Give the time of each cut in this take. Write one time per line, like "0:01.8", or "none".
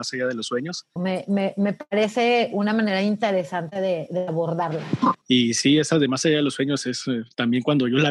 0:01.0
0:05.2